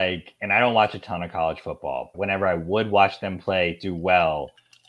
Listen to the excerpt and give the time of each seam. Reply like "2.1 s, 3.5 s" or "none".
2.1 s

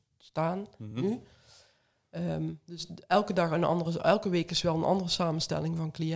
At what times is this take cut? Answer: none

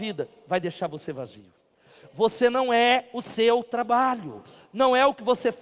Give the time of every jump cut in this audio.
2.0 s

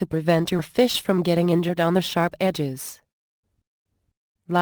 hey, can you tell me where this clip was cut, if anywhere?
none

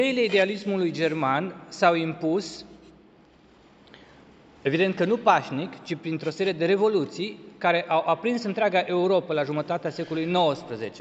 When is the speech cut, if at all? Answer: none

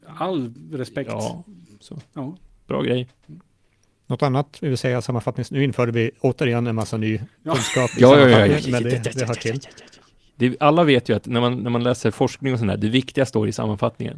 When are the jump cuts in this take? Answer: none

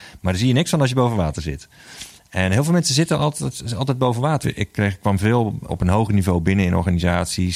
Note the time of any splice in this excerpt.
4.4 s, 5.7 s

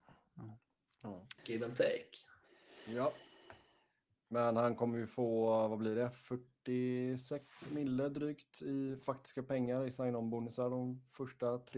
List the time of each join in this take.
1.4 s

